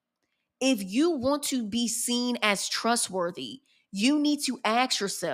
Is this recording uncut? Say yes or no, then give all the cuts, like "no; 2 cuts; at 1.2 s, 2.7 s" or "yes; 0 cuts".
yes; 0 cuts